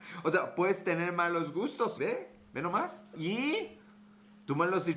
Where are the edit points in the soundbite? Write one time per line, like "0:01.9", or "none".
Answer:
0:02.0
0:03.1